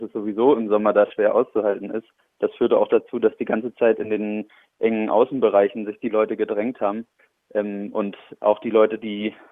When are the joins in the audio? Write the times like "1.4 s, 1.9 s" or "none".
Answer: none